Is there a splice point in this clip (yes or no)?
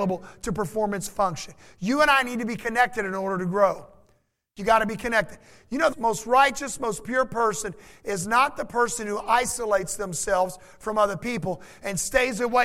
yes